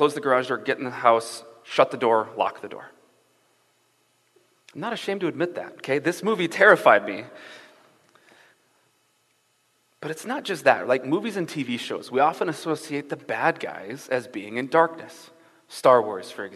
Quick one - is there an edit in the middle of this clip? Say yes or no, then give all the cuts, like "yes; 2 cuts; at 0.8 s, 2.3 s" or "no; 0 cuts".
no; 0 cuts